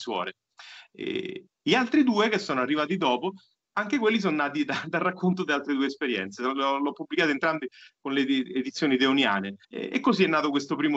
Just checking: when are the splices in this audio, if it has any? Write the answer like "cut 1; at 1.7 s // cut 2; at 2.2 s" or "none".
cut 1; at 9.6 s